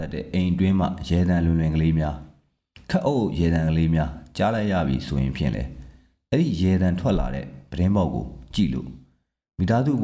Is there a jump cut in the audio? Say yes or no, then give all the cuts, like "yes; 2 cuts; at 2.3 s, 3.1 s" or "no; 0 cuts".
no; 0 cuts